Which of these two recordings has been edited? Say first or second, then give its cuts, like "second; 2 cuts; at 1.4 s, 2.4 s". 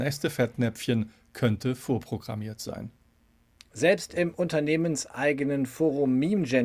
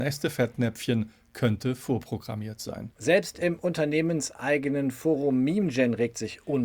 second; 1 cut; at 2.9 s